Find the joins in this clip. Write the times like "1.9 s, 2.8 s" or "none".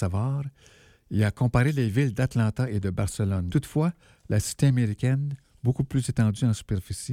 3.5 s